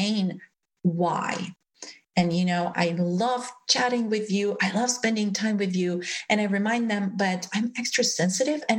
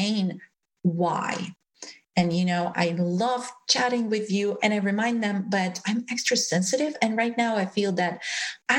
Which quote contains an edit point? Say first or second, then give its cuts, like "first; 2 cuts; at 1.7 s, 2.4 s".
second; 1 cut; at 4.6 s